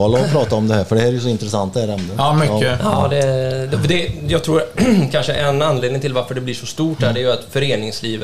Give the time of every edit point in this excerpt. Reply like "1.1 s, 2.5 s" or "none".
none